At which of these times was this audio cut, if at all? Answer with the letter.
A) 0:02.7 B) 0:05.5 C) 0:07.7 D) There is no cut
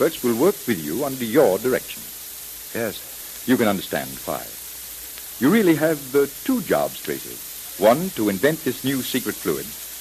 A